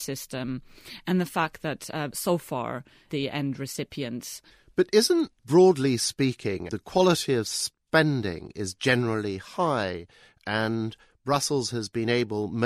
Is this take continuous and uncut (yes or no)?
no